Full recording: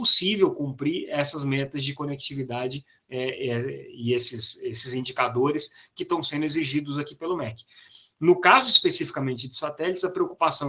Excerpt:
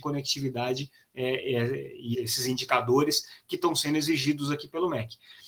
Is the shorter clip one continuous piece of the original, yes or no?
no